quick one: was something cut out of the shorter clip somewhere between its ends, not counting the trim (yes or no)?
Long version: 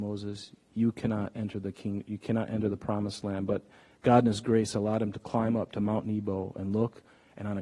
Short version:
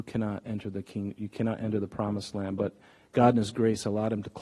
no